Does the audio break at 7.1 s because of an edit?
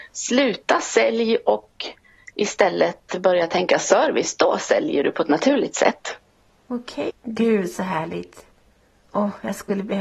yes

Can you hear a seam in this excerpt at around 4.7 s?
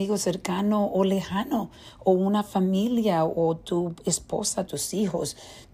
yes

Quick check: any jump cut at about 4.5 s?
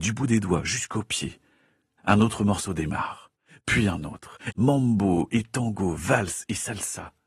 yes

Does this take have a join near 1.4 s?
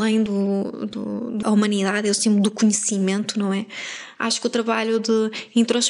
yes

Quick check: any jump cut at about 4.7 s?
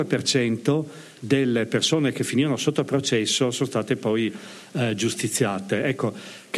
no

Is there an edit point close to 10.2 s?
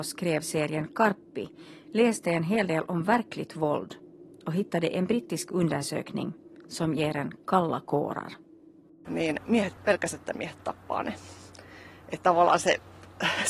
yes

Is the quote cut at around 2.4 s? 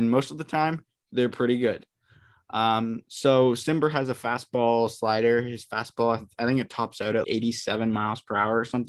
no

